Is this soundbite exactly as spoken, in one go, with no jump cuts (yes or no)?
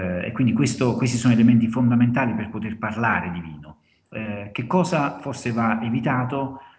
yes